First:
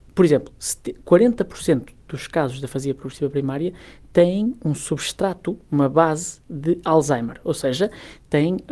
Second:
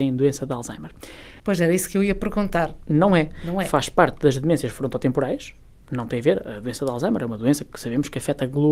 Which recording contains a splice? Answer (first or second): second